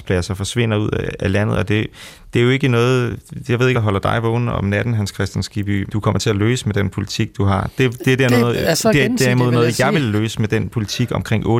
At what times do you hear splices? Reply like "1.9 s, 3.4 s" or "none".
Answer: 3.7 s, 5.9 s